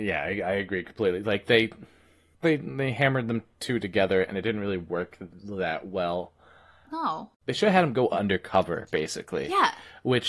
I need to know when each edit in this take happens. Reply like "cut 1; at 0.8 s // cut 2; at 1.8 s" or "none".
none